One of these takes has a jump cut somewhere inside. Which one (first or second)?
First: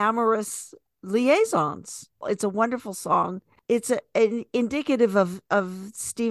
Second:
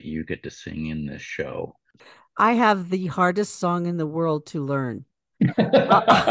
second